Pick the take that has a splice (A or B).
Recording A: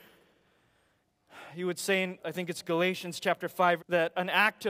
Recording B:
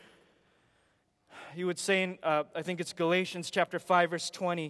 A